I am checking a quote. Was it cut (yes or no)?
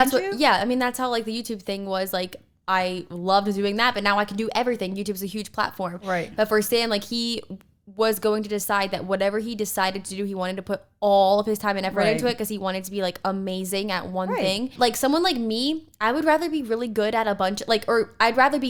yes